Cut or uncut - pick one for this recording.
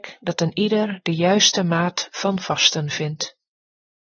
uncut